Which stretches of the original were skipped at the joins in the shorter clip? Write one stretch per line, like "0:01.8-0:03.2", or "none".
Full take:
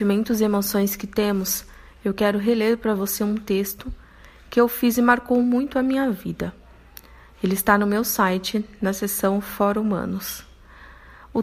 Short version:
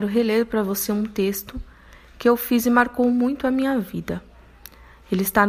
none